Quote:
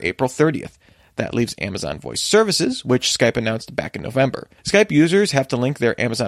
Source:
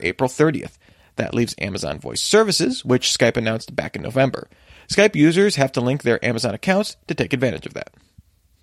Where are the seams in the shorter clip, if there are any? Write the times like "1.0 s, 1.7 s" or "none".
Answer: 4.6 s

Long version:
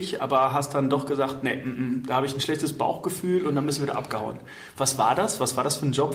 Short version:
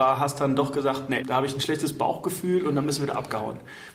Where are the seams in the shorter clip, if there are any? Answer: 1.2 s

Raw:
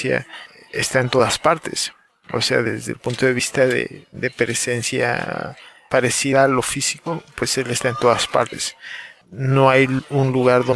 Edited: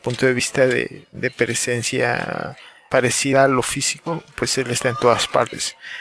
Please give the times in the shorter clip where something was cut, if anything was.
none

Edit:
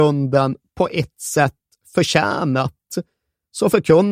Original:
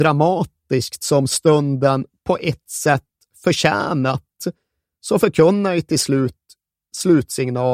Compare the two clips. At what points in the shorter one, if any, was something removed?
none

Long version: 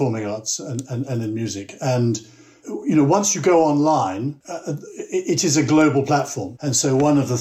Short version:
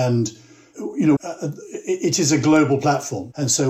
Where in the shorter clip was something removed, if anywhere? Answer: 1.2 s

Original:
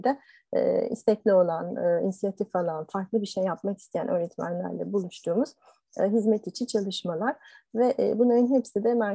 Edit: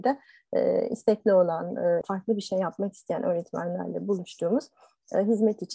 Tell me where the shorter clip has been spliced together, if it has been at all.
2.0 s

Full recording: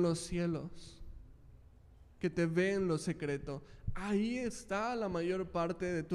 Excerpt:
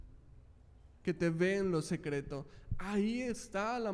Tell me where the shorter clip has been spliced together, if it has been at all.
none

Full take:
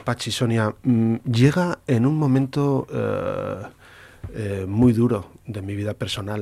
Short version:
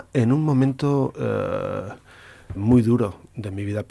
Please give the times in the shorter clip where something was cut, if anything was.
2.6 s

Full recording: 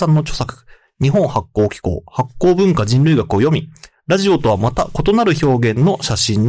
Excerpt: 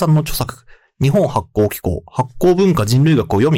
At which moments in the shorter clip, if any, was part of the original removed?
none

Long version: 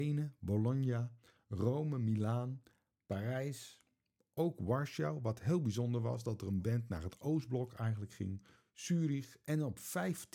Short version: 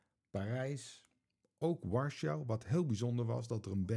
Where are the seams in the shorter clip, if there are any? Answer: none

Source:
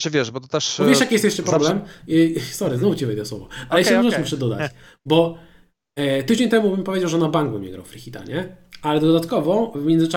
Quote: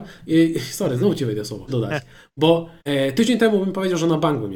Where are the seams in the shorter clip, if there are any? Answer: 1.7 s, 2.8 s

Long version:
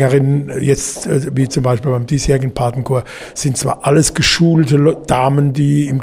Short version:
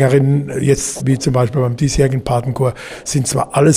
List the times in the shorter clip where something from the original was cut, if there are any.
1.0 s

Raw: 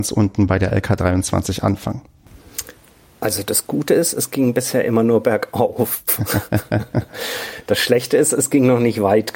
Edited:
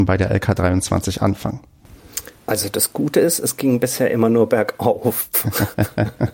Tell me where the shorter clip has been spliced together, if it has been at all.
2.4 s

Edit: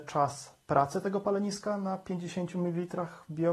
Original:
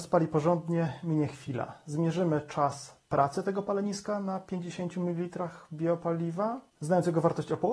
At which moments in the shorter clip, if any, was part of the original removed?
none

